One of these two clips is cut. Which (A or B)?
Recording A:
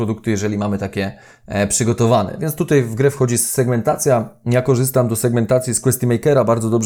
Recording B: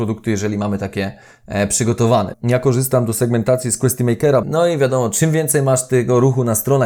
B